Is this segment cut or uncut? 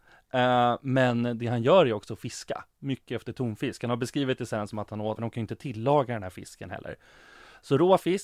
cut